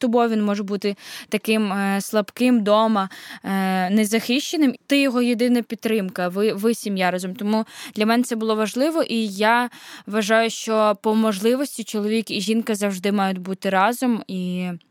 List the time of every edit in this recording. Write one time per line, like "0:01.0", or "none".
0:04.7